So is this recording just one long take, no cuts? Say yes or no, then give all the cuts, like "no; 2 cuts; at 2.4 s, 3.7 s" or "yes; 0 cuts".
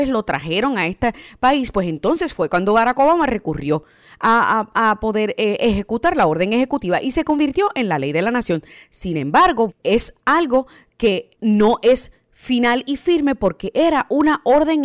no; 2 cuts; at 9.7 s, 11.3 s